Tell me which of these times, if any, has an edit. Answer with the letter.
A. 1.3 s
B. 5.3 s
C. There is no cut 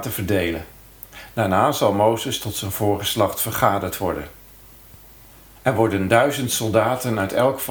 A